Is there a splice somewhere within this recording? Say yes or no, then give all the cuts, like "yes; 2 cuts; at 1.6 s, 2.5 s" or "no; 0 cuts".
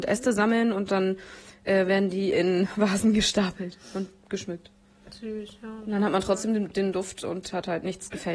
no; 0 cuts